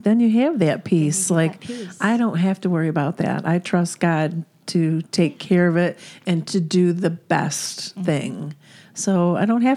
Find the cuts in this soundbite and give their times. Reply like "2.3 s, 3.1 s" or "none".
none